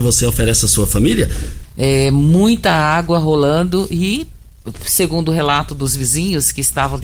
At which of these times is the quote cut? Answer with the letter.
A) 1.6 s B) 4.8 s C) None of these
A